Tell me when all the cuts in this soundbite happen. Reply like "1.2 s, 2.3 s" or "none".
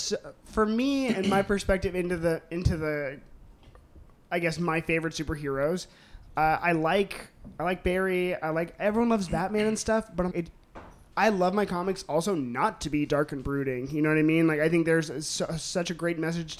10.3 s